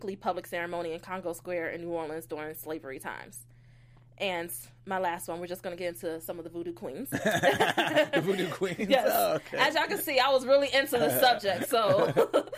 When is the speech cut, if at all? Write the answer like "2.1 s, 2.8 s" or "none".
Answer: none